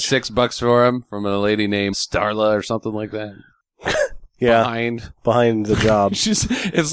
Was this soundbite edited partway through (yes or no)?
yes